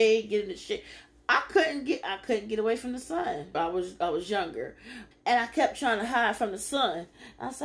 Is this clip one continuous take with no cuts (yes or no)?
no